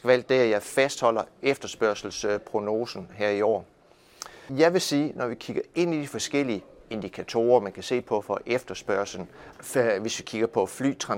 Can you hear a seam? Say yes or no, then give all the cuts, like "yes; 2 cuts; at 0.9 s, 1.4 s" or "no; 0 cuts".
yes; 2 cuts; at 4.5 s, 9.5 s